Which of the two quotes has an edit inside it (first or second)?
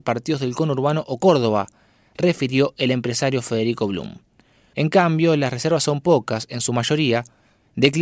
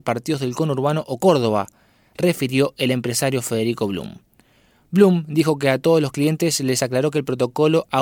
first